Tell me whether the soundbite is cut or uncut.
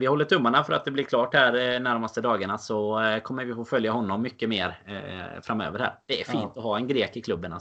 uncut